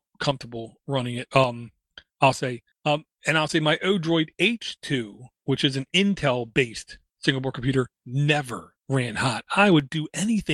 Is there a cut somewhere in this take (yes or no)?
no